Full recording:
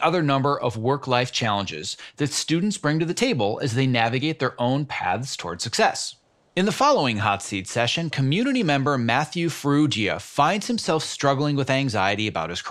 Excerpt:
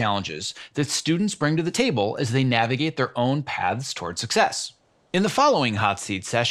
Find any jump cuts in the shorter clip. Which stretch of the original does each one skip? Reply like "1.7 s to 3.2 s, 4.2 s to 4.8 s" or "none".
none